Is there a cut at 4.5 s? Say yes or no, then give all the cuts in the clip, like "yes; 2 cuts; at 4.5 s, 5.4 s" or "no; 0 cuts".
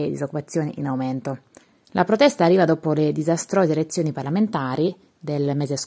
no; 1 cut; at 1.8 s